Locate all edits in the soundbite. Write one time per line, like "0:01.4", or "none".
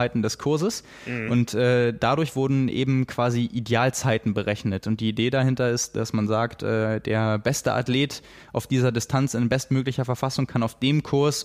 none